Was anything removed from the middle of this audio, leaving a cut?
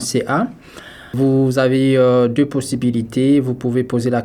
no; 0 cuts

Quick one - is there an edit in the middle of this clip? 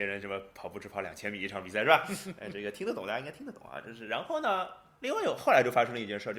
no; 0 cuts

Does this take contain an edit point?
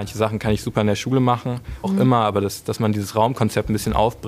yes; 1 cut; at 1.8 s

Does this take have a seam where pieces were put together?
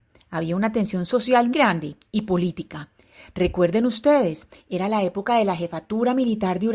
yes; 1 cut; at 1.5 s

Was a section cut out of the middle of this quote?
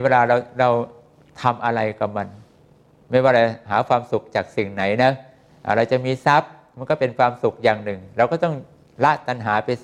no; 0 cuts

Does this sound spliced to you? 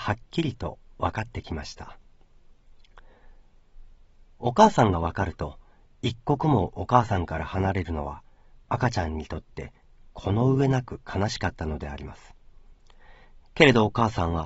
no; 0 cuts

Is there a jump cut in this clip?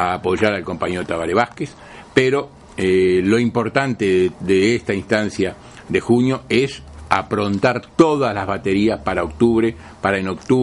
no; 0 cuts

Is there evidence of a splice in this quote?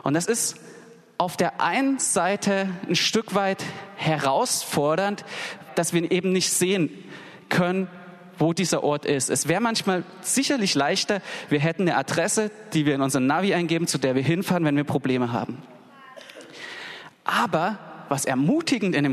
yes; 1 cut; at 5.7 s

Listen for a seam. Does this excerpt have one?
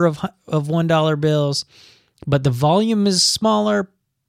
no; 0 cuts

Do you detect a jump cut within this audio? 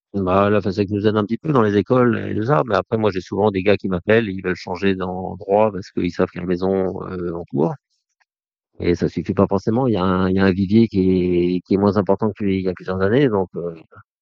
no; 0 cuts

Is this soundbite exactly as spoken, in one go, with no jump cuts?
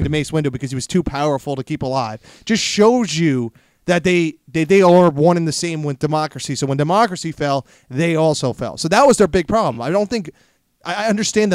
yes; 0 cuts

